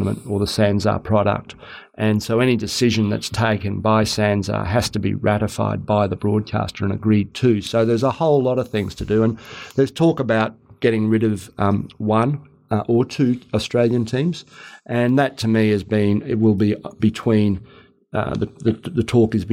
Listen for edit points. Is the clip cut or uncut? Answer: uncut